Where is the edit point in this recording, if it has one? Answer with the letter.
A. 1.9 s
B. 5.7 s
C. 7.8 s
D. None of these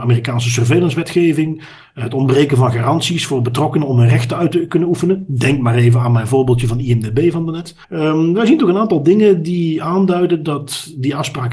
C